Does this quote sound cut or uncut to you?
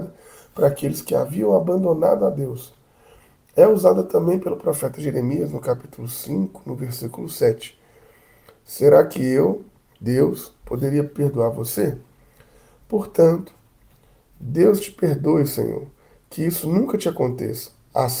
uncut